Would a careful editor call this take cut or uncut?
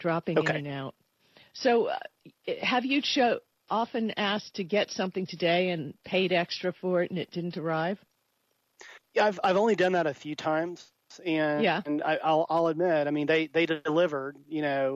uncut